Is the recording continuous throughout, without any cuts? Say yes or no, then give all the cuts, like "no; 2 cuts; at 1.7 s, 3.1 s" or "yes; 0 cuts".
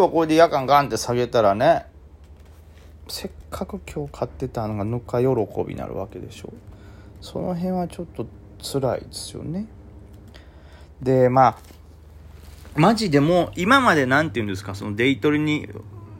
yes; 0 cuts